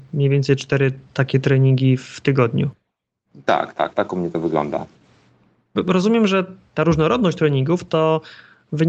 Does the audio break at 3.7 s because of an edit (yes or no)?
no